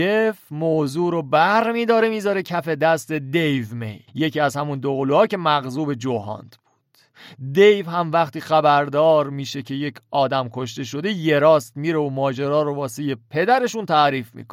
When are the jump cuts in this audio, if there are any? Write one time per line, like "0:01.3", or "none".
0:04.1